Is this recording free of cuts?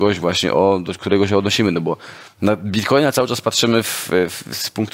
yes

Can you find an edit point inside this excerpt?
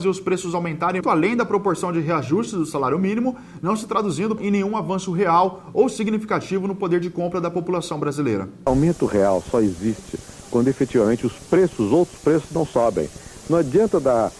yes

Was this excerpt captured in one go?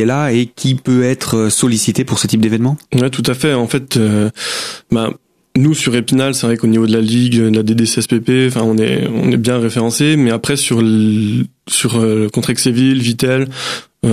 yes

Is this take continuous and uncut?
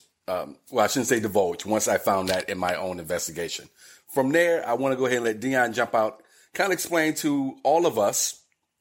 yes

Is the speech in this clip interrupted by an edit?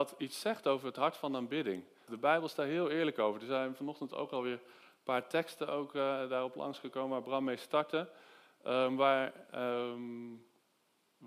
yes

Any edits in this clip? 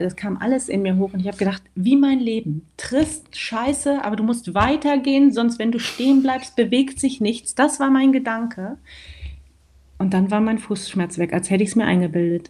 no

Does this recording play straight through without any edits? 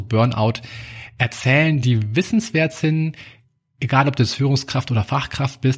yes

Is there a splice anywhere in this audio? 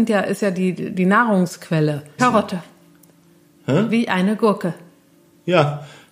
yes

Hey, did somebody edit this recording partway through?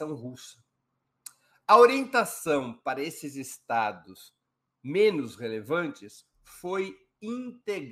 no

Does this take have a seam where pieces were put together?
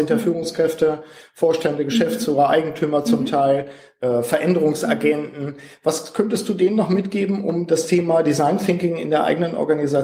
no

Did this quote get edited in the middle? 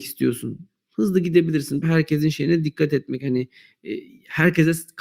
yes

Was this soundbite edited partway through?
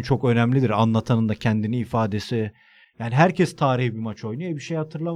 yes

